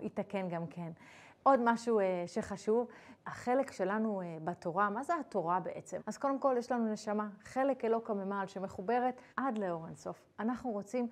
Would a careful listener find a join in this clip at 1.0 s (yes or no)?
no